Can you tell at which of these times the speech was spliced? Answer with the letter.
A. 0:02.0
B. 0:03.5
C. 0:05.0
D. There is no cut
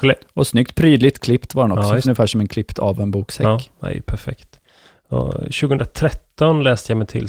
A